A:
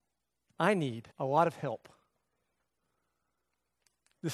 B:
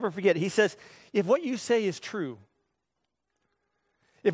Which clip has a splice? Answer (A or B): A